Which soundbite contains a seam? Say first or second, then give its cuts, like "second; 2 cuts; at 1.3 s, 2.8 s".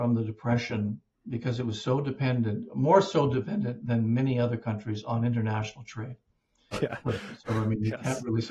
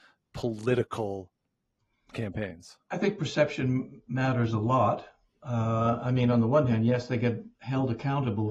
first; 1 cut; at 6.7 s